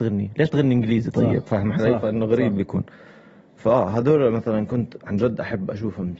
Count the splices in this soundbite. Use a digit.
0